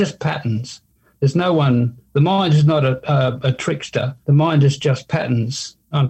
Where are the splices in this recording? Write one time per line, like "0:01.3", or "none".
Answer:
0:04.2